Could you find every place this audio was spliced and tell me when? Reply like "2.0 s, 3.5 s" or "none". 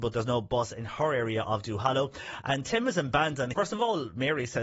3.5 s